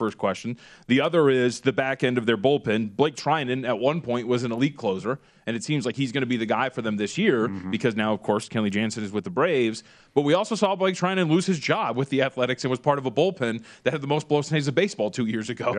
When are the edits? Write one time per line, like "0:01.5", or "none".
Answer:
none